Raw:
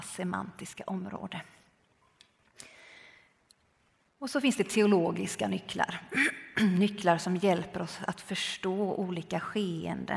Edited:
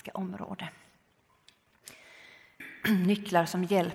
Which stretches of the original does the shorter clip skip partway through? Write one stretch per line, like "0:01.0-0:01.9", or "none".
0:03.3-0:06.3